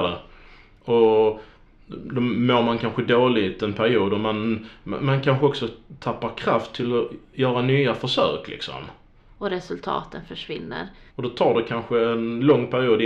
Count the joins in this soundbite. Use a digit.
2